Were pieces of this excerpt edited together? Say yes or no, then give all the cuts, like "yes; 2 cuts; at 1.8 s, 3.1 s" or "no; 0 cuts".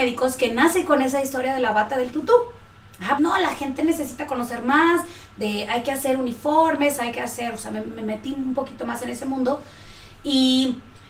yes; 1 cut; at 3.2 s